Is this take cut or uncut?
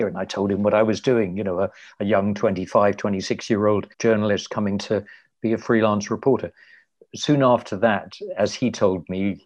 cut